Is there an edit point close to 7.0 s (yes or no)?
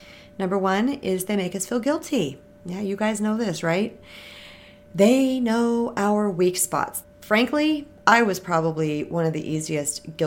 yes